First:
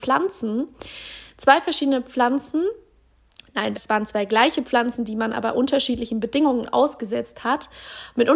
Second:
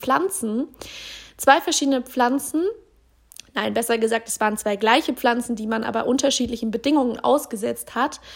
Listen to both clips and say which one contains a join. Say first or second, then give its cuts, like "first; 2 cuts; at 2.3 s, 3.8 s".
first; 1 cut; at 3.7 s